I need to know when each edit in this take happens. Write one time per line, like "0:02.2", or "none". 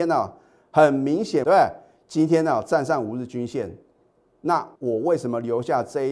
0:01.4
0:04.8